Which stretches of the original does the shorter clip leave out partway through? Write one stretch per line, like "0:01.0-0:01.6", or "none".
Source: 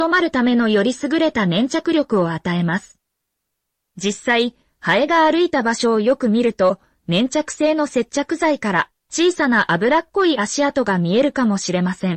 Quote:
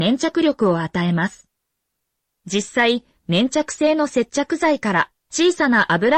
0:04.7-0:07.0